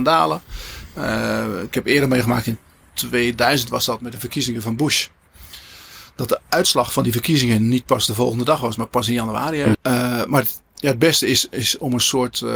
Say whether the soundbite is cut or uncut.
cut